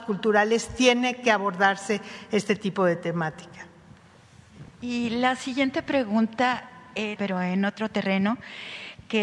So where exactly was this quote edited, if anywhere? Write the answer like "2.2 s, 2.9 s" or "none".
4.7 s, 7.2 s